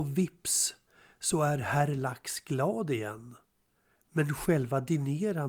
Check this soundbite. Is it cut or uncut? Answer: cut